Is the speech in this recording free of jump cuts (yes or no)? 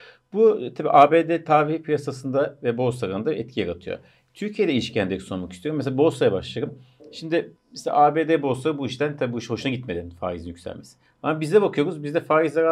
yes